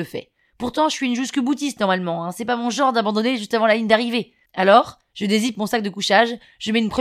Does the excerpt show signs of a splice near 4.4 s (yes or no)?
no